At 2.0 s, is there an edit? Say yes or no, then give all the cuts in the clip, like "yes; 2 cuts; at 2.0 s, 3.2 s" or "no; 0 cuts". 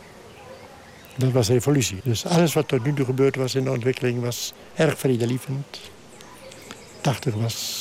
yes; 1 cut; at 2.0 s